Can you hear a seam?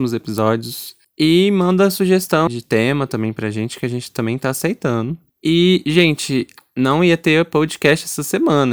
yes; 2 cuts; at 2.5 s, 5.3 s

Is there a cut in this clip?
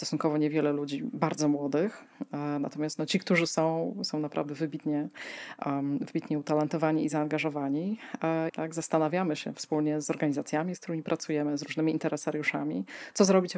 yes; 2 cuts; at 8.5 s, 10.0 s

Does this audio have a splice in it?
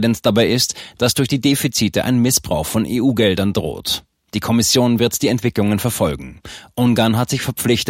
no; 0 cuts

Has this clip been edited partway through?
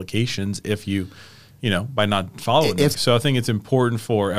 yes; 1 cut; at 2.9 s

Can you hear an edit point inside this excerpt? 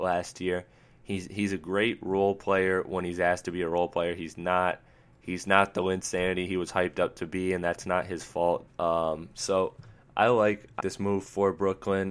yes; 2 cuts; at 8.7 s, 10.8 s

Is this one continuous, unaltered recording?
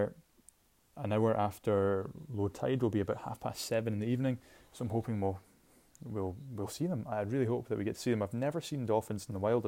yes; 0 cuts

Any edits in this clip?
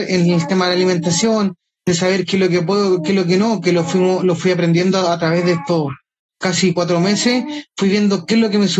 no; 0 cuts

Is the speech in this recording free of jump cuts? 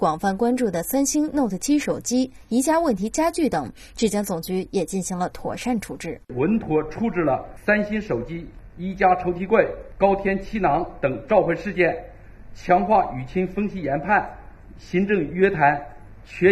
no; 1 cut; at 6.2 s

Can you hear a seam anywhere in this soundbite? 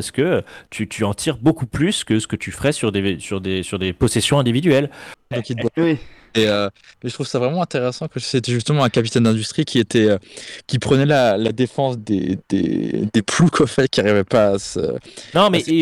yes; 2 cuts; at 5.3 s, 12.0 s

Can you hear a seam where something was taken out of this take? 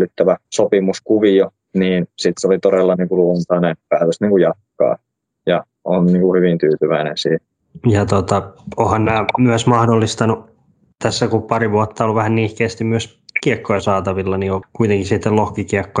yes; 1 cut; at 14.6 s

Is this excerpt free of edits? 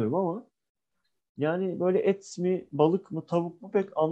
yes; 0 cuts

